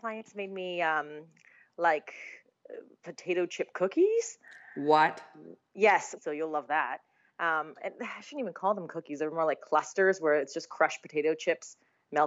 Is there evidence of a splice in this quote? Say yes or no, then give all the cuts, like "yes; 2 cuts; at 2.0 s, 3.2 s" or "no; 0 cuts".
yes; 1 cut; at 6.2 s